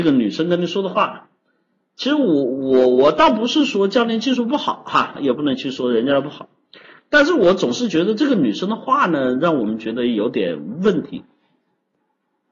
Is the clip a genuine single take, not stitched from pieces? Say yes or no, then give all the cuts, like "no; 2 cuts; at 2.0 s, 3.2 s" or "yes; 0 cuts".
no; 1 cut; at 5.2 s